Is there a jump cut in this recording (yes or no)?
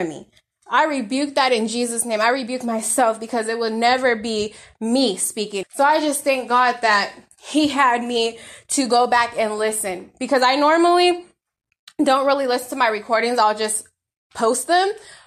yes